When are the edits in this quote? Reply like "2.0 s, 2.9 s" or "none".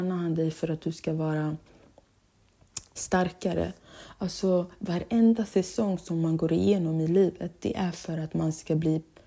3.0 s